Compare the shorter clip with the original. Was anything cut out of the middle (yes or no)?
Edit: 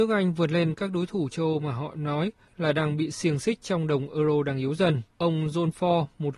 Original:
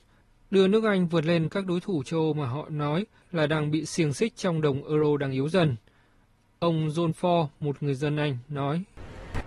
yes